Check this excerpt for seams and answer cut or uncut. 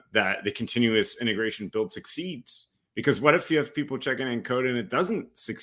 uncut